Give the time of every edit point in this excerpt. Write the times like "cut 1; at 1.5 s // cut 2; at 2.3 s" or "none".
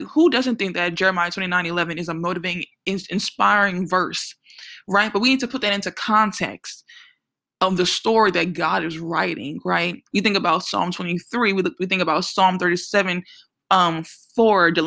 cut 1; at 10.1 s